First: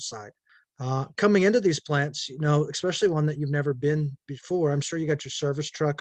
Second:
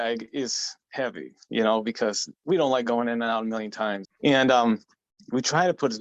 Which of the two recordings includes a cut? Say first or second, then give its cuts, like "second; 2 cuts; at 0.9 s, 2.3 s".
second; 1 cut; at 4.0 s